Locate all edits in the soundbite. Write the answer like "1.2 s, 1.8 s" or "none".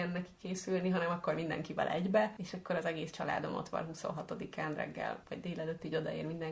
none